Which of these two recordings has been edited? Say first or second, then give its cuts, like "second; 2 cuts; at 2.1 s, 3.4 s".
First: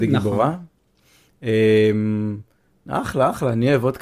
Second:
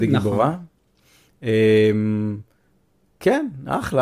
first; 1 cut; at 2.9 s